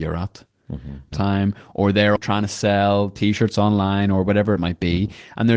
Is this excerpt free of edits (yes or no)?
no